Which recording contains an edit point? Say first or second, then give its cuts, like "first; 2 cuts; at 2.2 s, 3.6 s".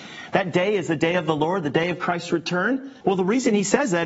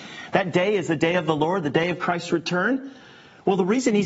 first; 1 cut; at 3.0 s